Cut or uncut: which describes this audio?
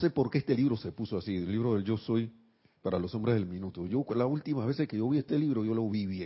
uncut